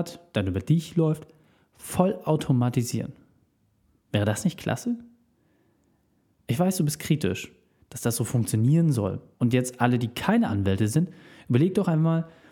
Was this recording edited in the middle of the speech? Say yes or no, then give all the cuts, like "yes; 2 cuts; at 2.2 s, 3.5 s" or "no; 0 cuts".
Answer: yes; 1 cut; at 9.3 s